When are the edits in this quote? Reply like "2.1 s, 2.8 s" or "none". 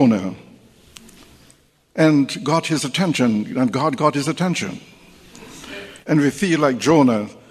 6.0 s